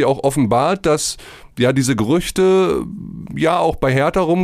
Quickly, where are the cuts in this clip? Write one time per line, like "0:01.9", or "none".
none